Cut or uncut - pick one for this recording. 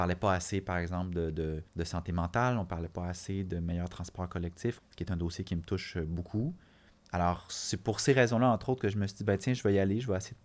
cut